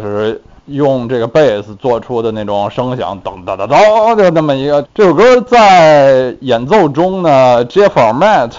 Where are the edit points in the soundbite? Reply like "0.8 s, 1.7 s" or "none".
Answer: 4.8 s